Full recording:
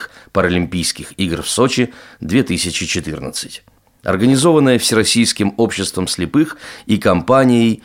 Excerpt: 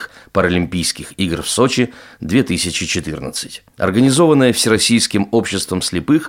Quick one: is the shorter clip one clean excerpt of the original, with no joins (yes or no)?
no